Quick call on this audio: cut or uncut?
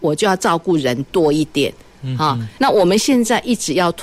cut